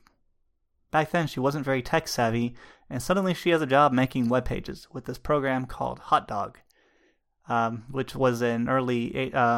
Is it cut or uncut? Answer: uncut